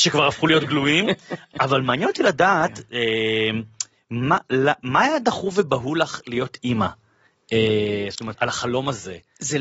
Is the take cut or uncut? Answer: cut